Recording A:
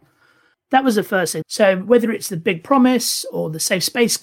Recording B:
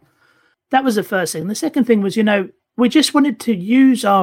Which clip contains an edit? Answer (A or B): A